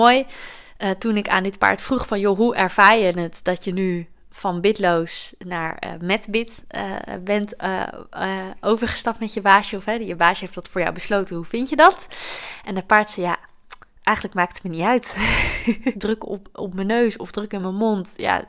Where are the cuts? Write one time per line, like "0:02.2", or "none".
0:15.9